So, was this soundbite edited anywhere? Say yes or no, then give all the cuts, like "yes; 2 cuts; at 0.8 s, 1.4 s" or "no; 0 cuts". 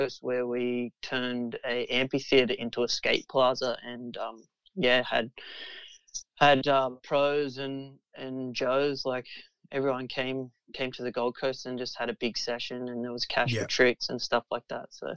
no; 0 cuts